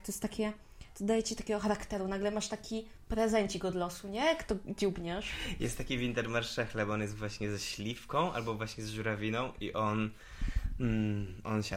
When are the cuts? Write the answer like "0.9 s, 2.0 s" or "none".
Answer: none